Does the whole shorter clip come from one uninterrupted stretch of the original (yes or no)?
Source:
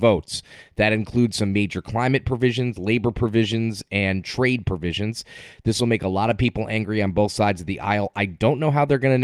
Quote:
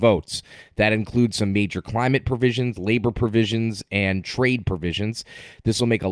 yes